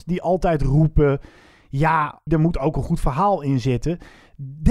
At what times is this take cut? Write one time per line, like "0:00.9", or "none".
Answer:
0:02.3